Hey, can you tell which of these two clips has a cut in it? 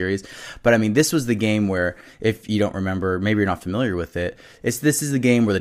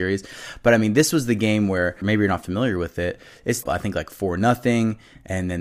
second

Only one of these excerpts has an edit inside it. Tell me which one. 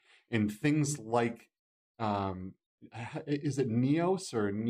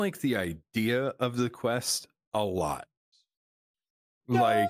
second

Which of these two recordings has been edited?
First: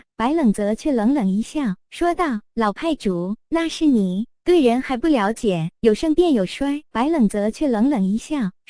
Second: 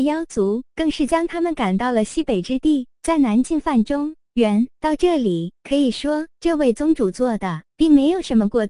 first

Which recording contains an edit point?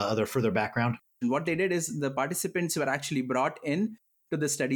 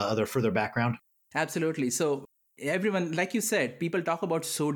first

